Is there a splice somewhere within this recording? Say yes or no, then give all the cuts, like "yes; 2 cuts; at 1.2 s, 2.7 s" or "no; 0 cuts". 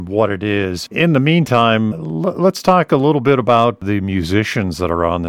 yes; 2 cuts; at 0.9 s, 1.9 s